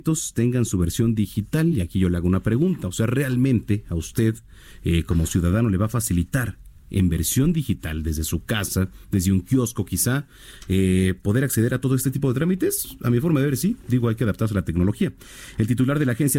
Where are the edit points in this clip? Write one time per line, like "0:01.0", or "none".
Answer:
none